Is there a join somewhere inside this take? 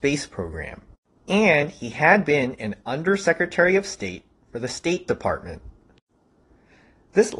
yes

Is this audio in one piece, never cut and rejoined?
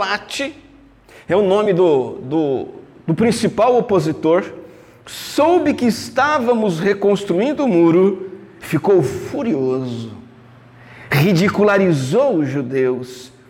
yes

